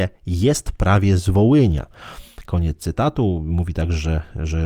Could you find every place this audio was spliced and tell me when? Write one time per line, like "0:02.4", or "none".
none